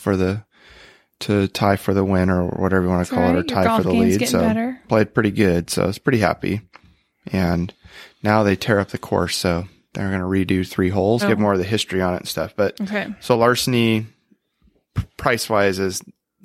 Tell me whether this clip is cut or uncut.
cut